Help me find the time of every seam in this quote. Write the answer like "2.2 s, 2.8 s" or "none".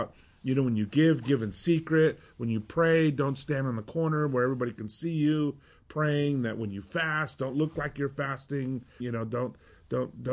9.0 s